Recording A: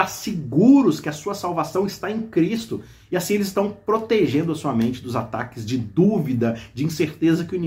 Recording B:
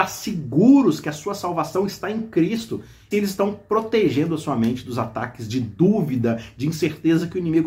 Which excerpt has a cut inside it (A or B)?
B